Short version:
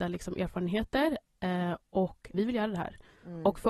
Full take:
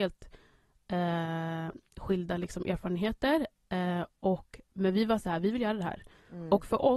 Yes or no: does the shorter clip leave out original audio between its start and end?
yes